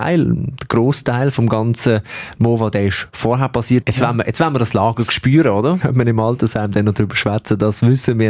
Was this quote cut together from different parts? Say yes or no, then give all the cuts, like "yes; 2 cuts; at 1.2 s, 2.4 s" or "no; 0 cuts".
yes; 2 cuts; at 3.8 s, 5.8 s